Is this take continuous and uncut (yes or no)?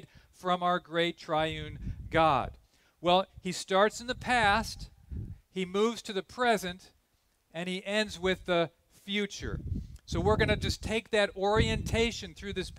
yes